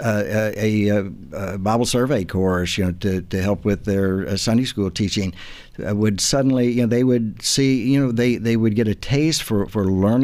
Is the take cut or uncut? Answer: uncut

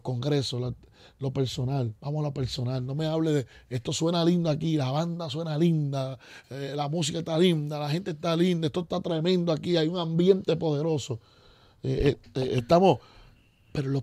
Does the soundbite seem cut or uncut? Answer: uncut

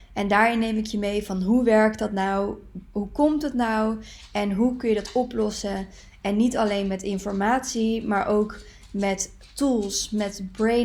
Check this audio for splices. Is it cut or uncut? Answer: uncut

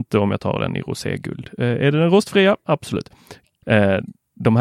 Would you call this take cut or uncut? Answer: cut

